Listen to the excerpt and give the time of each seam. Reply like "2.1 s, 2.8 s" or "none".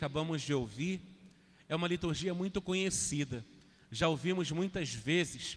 none